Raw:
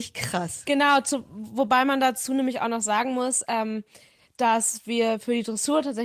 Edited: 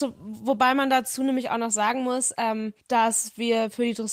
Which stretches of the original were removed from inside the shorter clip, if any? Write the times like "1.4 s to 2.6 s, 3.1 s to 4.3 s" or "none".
3.9 s to 4.3 s